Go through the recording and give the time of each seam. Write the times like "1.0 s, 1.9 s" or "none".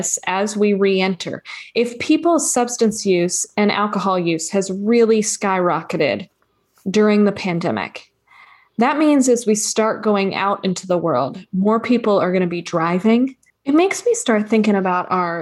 13.5 s